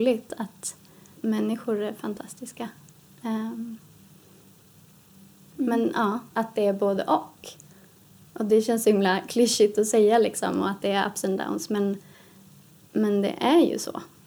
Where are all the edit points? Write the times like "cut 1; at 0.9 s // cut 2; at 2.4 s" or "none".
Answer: cut 1; at 6.3 s